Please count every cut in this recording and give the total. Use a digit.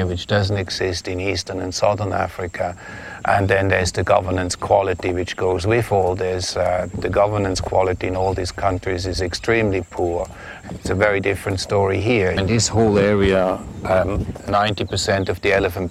3